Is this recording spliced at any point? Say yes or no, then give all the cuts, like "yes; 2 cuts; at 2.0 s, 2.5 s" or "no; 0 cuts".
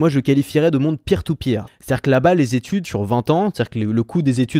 yes; 2 cuts; at 1.7 s, 2.8 s